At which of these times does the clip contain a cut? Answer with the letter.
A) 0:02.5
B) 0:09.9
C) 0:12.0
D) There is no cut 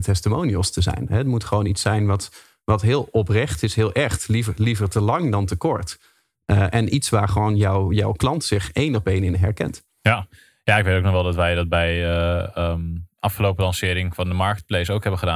D